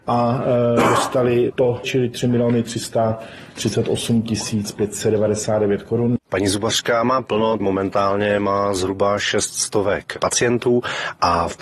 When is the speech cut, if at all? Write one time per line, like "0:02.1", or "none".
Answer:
0:01.8
0:06.2
0:07.6